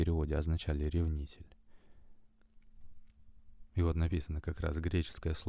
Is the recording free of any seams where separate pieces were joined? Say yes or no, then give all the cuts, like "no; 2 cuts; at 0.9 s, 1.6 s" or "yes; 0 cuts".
yes; 0 cuts